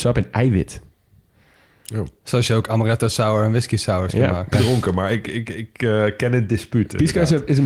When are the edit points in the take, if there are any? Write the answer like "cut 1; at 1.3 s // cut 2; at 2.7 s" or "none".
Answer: cut 1; at 4.5 s